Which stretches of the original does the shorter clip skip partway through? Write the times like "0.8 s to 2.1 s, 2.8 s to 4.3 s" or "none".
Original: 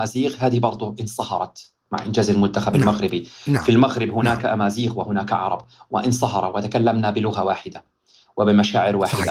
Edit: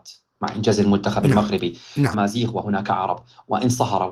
3.6 s to 4.5 s

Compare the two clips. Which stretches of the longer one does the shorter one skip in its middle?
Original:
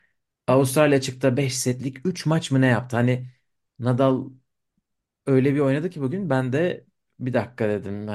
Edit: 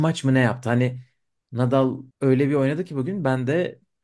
4.4 s to 5.2 s

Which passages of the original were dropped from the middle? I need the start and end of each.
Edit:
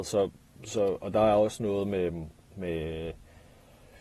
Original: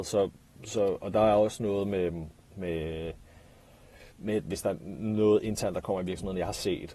none

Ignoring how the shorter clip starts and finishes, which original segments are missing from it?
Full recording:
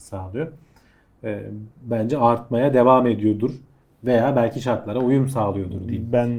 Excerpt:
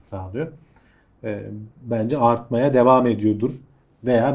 none

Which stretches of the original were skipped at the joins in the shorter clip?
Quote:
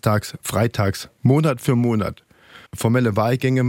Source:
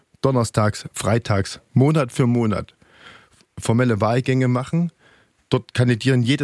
3.2 s to 3.5 s

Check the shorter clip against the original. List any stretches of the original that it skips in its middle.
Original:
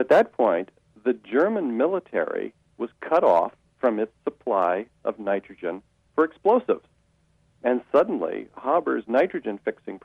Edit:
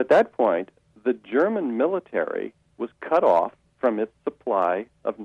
none

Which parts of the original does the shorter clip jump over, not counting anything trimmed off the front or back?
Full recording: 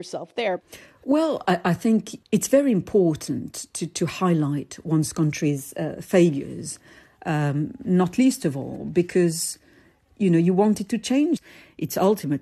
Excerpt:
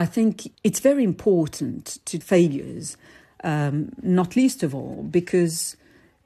3.9 s to 6.0 s

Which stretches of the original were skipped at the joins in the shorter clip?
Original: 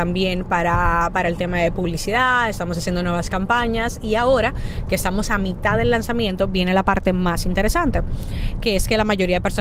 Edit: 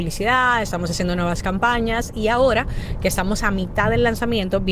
none

